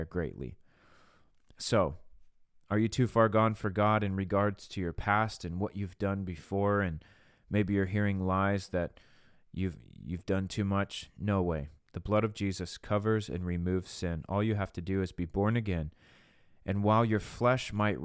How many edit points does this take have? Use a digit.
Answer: 1